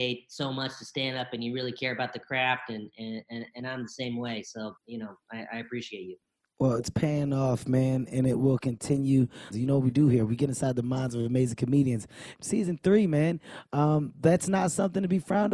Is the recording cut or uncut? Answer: cut